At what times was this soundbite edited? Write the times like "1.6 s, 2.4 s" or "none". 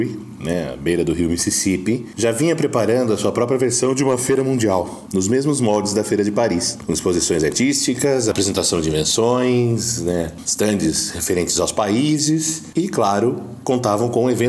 none

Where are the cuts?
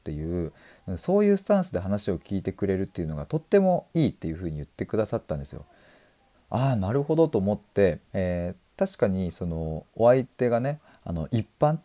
6.3 s, 8.0 s, 9.9 s

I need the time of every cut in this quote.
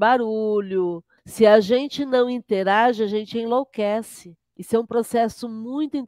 1.2 s, 4.4 s

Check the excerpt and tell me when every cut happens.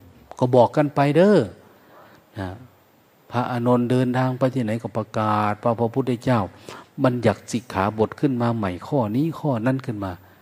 none

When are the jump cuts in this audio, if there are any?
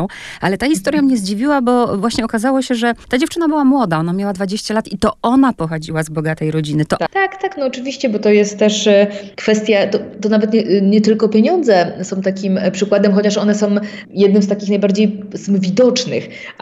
7.1 s

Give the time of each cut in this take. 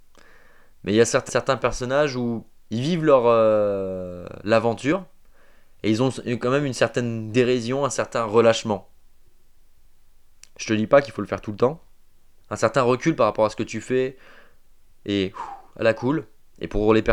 1.3 s, 12.4 s

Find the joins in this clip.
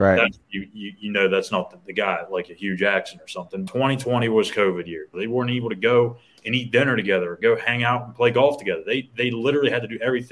3.7 s, 5.1 s

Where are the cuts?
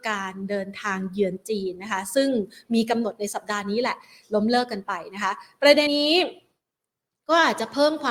5.9 s

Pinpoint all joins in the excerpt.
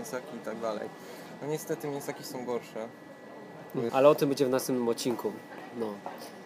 3.9 s

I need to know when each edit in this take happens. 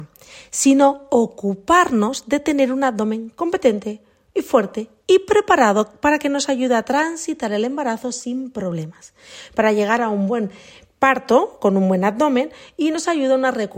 none

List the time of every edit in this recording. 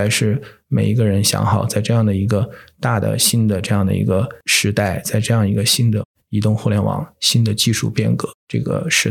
none

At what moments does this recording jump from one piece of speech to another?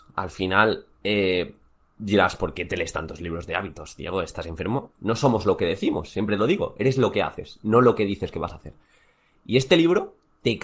4.9 s

